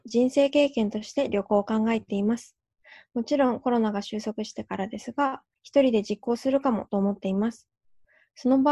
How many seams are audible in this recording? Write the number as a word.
one